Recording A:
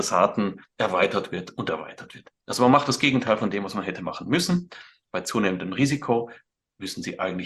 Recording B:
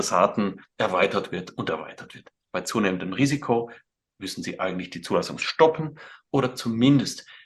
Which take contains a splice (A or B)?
B